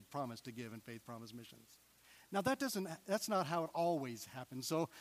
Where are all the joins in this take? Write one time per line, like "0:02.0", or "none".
none